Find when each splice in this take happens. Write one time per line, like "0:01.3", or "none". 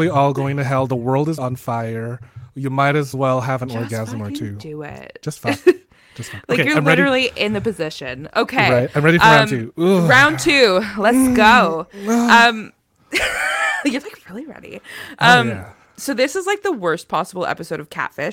0:01.4